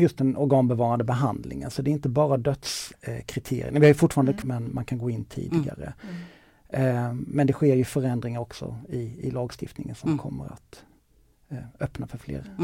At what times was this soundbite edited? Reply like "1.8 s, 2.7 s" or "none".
4.4 s